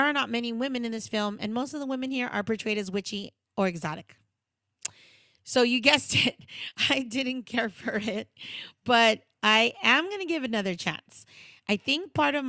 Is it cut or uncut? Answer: cut